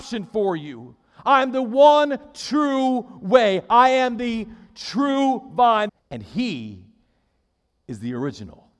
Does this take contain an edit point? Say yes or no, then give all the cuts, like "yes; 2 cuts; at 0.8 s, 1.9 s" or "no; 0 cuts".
yes; 1 cut; at 5.9 s